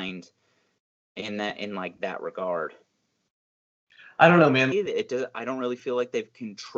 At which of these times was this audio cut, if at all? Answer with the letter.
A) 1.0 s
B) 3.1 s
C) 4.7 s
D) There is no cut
C